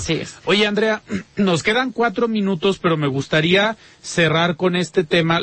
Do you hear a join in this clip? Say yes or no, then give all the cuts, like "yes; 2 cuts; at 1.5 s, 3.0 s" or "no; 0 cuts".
no; 0 cuts